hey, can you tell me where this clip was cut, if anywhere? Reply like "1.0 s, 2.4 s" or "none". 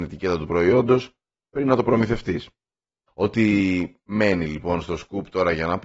3.1 s